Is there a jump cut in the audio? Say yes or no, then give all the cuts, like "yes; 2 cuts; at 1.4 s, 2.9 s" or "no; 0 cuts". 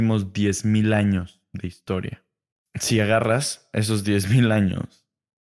no; 0 cuts